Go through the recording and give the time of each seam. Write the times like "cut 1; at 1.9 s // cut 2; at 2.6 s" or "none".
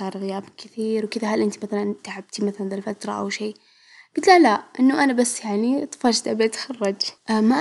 none